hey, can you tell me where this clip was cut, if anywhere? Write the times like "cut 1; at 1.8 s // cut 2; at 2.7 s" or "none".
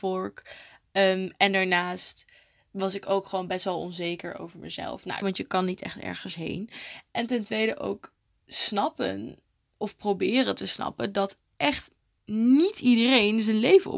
cut 1; at 5.2 s // cut 2; at 7.1 s